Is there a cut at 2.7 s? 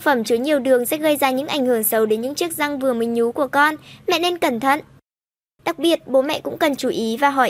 no; 1 cut; at 5.6 s

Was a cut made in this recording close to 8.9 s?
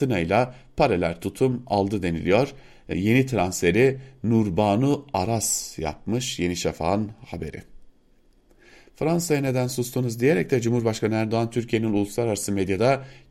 no; 1 cut; at 2.9 s

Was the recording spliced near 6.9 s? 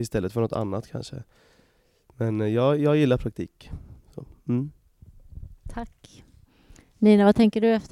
no; 0 cuts

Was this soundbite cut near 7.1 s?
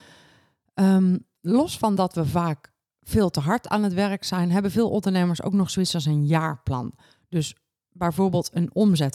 no; 0 cuts

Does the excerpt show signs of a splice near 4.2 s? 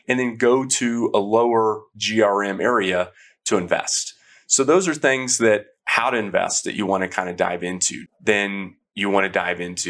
no; 1 cut; at 8.1 s

